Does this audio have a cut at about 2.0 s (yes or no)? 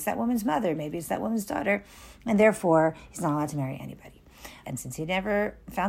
no